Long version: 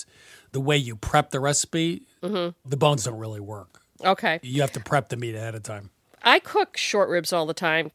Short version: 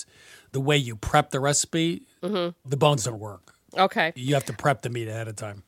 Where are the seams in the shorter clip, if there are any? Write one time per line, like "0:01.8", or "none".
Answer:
0:03.2